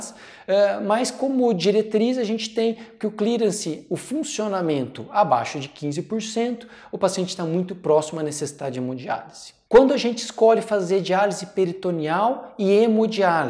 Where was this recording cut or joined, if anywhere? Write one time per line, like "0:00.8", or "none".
0:09.7